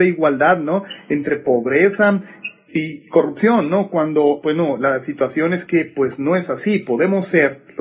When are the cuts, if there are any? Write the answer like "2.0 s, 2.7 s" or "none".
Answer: 2.7 s